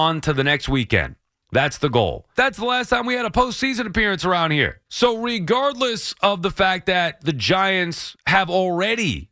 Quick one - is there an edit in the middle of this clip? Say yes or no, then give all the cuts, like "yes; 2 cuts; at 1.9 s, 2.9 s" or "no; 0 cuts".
yes; 2 cuts; at 2.4 s, 4.9 s